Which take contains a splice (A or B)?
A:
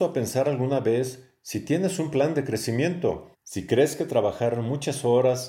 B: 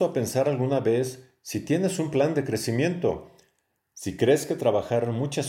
A